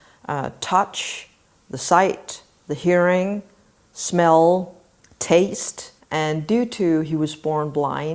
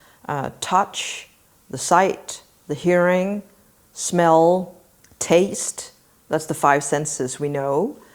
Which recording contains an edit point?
first; 1 cut; at 6.0 s

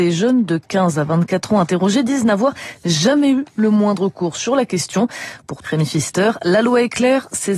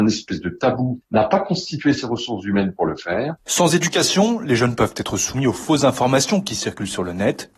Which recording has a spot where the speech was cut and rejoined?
first; 1 cut; at 5.6 s

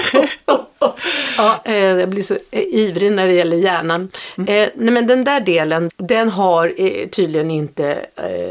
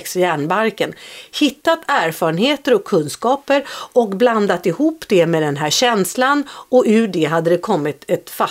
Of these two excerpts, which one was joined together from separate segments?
first; 1 cut; at 5.9 s

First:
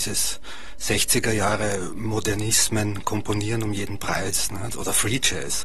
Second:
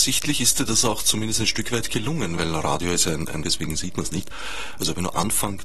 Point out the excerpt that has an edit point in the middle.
second; 2 cuts; at 2.4 s, 3.4 s

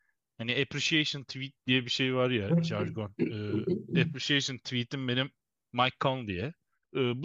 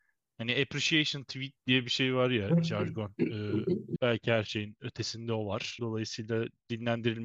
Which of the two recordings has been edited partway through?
second; 2 cuts; at 4.0 s, 5.8 s

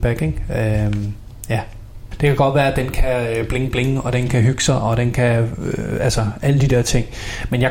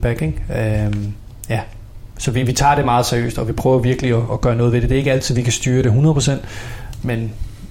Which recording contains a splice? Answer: first; 1 cut; at 2.1 s

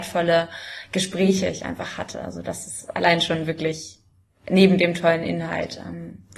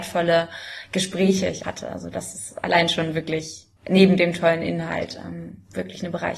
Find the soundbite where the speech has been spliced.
second; 2 cuts; at 1.6 s, 3.8 s

